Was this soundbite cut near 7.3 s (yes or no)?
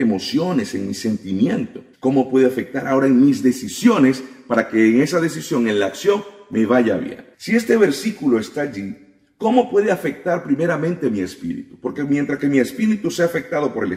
yes